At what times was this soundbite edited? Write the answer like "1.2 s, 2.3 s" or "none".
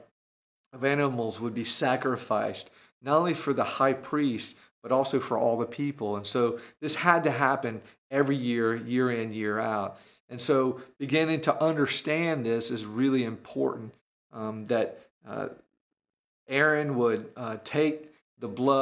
none

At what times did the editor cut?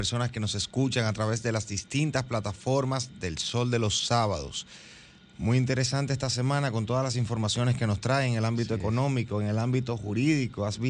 none

